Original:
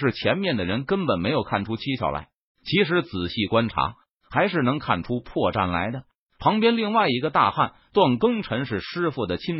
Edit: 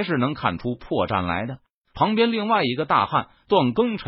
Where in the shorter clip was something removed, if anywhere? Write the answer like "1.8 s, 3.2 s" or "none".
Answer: none